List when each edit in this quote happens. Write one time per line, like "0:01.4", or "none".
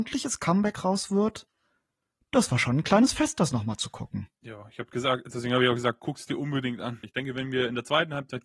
0:04.3
0:07.0